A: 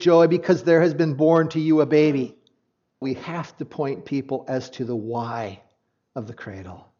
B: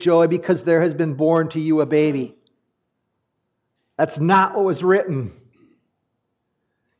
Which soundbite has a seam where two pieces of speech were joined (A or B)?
A